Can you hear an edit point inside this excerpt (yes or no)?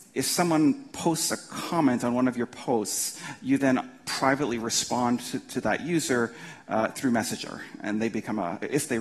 no